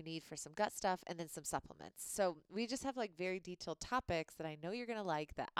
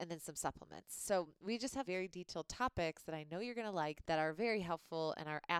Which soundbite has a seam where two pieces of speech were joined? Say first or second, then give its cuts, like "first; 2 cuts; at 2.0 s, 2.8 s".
second; 2 cuts; at 1.8 s, 4.0 s